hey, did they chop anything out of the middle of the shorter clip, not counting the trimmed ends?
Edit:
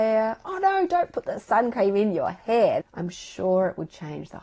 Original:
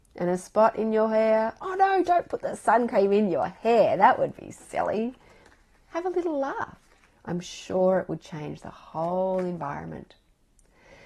yes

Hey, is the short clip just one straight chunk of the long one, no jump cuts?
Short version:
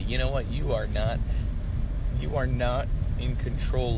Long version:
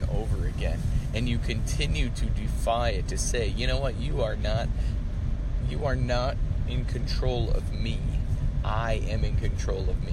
yes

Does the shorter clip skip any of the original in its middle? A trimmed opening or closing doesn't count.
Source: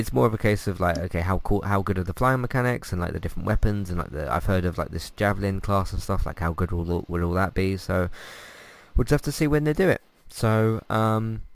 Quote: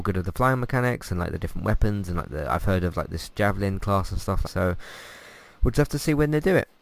yes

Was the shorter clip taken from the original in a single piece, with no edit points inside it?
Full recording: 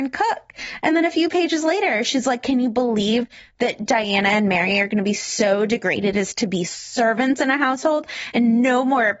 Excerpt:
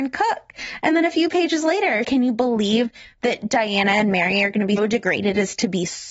no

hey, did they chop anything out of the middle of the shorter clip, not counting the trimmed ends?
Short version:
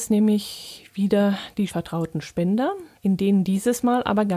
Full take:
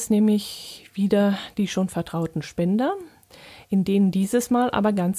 yes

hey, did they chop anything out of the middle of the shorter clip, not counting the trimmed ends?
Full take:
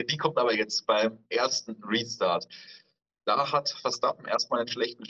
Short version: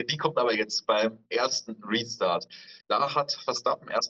yes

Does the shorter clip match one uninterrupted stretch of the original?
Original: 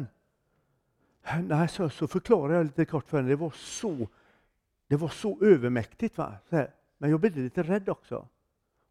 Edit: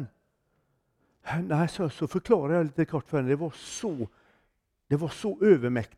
yes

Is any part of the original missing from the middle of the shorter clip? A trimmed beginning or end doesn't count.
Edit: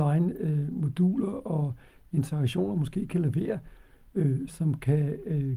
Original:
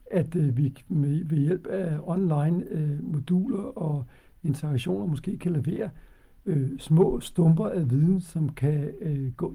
yes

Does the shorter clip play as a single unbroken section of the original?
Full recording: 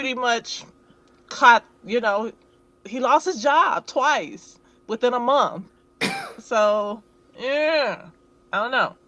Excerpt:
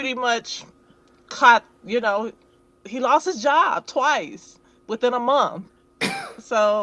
yes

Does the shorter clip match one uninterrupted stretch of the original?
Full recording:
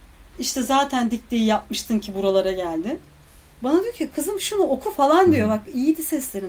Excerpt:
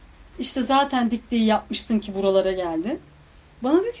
yes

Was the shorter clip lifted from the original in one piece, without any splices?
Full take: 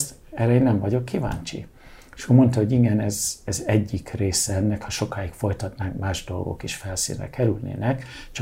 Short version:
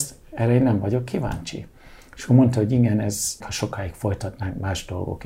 no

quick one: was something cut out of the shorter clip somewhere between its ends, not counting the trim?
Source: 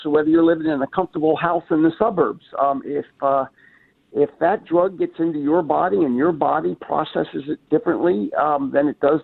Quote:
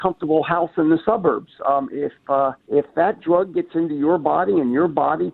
yes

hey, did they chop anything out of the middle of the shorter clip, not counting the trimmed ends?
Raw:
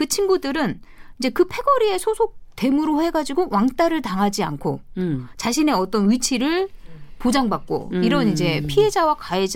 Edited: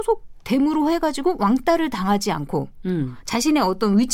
no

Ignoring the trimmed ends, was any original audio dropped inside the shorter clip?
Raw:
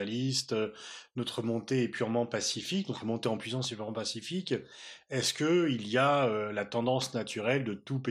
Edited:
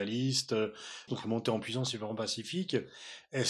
yes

